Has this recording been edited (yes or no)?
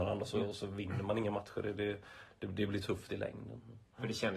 no